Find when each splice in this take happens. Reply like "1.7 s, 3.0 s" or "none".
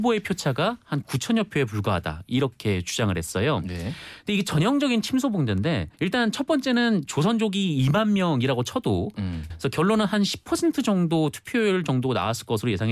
5.9 s, 9.5 s